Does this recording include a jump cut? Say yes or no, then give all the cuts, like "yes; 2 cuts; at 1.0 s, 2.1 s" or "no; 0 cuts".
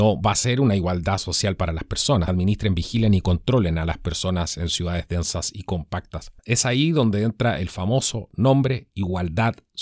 yes; 2 cuts; at 2.3 s, 6.4 s